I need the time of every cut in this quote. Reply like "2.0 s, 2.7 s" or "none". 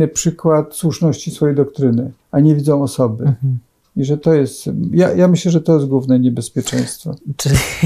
2.2 s